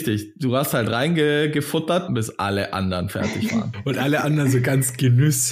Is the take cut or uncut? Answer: cut